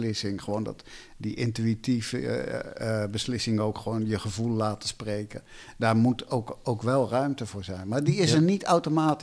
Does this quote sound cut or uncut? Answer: uncut